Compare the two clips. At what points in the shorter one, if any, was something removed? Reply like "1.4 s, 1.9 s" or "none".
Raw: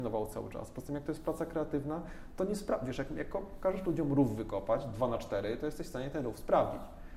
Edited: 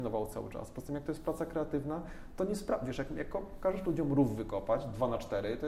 none